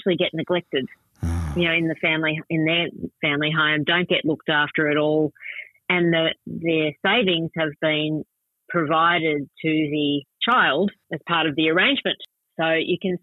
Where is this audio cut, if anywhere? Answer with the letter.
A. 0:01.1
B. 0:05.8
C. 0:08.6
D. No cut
D